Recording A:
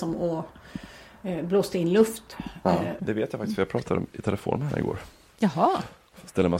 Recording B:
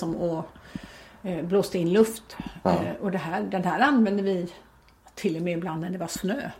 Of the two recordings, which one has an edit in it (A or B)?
A